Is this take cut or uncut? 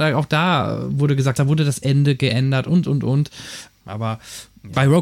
cut